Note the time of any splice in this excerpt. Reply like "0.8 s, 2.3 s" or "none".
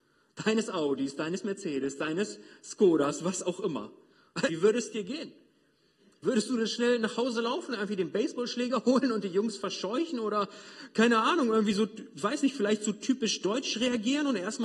4.5 s